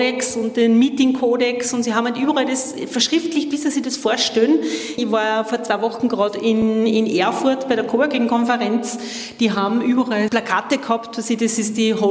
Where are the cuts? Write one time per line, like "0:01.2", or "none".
0:05.0
0:10.3